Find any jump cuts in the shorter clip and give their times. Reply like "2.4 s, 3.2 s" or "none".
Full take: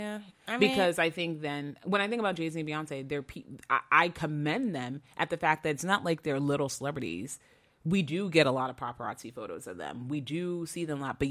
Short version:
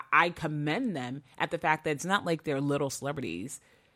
none